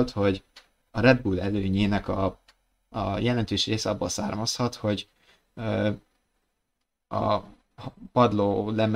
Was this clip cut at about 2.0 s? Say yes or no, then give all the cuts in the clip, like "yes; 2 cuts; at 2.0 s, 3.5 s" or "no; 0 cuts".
no; 0 cuts